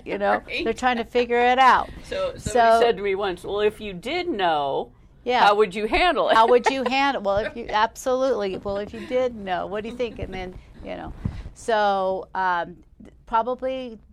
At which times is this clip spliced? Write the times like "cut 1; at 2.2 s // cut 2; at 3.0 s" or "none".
none